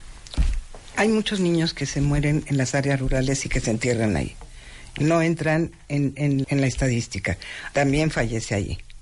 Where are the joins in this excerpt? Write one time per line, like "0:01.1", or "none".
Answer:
0:06.4
0:07.7